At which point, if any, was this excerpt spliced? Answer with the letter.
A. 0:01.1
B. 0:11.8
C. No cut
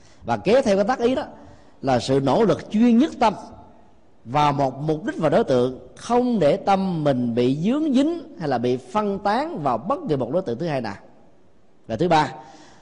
A